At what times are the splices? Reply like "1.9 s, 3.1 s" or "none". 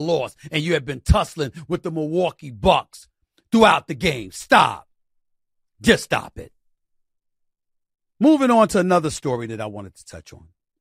none